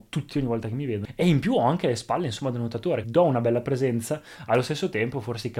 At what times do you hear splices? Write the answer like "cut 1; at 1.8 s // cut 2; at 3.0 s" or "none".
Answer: cut 1; at 3.0 s